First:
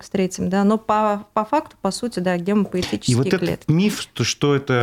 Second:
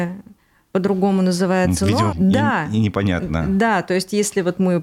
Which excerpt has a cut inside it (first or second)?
second